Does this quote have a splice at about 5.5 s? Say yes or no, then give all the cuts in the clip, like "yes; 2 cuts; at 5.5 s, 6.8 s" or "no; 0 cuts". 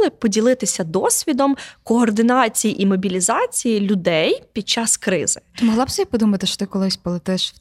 no; 0 cuts